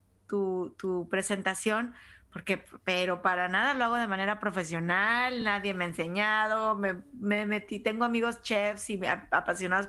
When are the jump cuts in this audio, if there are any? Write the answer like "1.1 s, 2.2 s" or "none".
none